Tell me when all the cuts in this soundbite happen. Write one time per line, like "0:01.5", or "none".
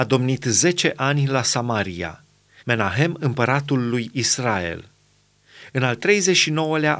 0:02.6